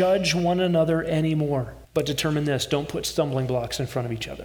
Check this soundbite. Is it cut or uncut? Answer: cut